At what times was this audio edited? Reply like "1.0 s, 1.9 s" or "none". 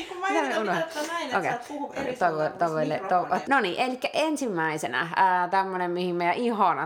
3.4 s